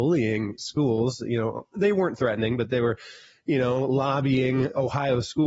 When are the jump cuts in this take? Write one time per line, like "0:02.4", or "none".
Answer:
0:01.7